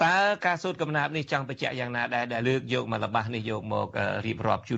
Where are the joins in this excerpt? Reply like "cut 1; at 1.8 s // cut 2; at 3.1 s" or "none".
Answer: cut 1; at 2.4 s